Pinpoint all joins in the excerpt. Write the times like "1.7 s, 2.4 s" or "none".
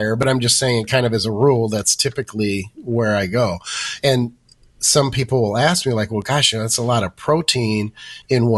none